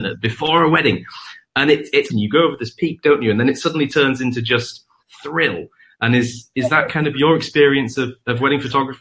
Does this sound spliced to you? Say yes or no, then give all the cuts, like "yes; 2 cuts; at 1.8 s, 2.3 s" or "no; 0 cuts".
yes; 1 cut; at 2.1 s